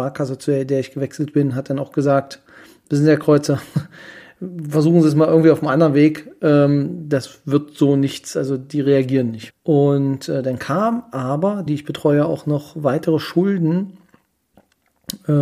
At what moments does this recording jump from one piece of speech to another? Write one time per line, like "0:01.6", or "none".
0:09.5
0:11.7